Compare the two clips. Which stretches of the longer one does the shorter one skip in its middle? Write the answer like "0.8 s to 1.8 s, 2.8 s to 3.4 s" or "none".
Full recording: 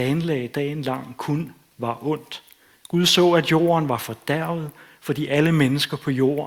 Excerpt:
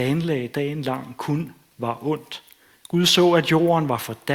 none